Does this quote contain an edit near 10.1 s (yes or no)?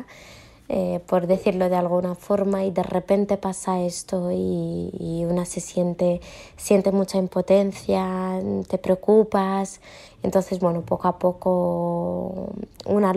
yes